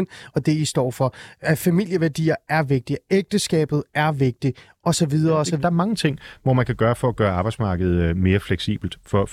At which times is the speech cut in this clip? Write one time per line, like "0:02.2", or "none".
0:05.6